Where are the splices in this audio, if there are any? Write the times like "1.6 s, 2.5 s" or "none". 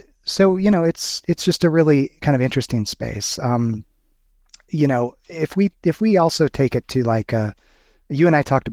none